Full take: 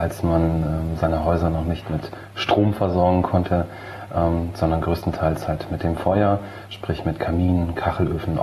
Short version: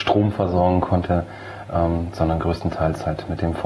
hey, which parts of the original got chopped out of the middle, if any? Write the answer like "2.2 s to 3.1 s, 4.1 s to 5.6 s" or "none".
none